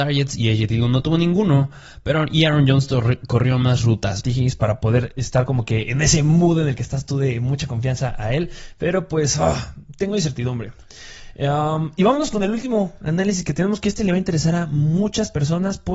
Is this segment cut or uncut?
cut